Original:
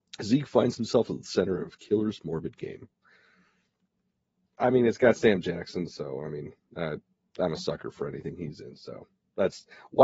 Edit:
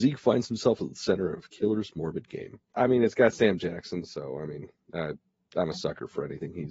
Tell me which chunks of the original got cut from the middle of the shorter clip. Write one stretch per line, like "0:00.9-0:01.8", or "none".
0:03.0-0:04.5